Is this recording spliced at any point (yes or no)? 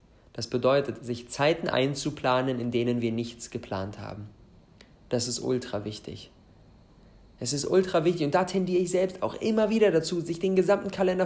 no